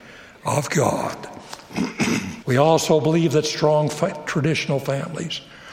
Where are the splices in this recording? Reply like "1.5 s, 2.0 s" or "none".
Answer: 2.4 s